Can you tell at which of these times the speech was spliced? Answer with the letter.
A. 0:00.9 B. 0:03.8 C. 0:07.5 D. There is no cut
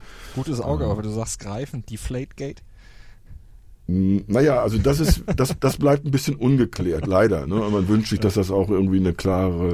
B